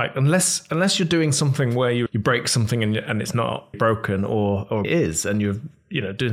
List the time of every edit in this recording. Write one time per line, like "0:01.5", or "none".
0:02.1
0:03.7
0:04.8